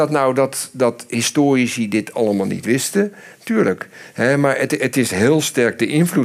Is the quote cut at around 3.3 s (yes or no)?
no